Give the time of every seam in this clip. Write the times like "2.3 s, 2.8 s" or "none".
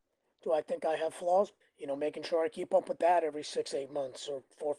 1.6 s